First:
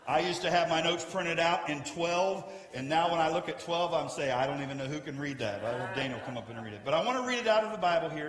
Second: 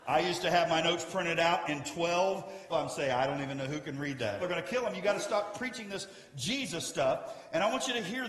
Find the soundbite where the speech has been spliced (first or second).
second